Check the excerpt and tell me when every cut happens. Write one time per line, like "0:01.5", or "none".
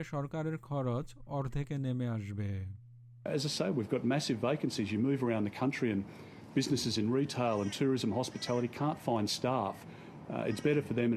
0:09.8

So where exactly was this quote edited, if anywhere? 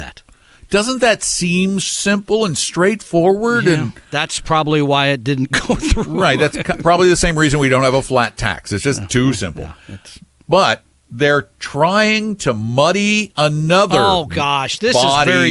0:01.8

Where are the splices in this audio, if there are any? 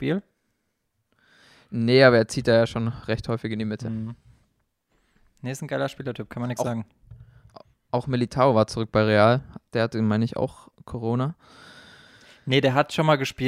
none

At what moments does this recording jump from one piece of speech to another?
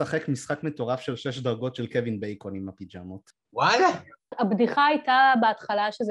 0:03.4

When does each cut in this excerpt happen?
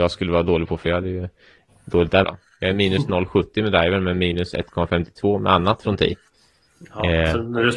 0:02.2

